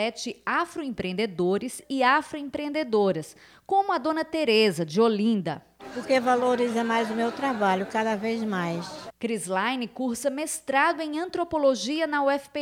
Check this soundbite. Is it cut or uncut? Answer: cut